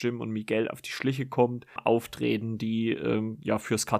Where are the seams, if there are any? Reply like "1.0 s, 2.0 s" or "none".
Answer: 1.8 s